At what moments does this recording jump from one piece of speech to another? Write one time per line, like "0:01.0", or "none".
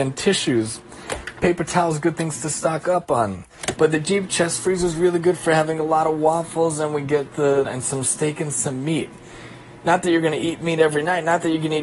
0:03.8
0:07.6